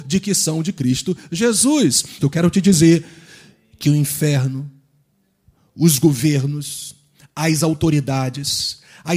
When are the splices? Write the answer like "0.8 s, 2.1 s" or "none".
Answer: 2.2 s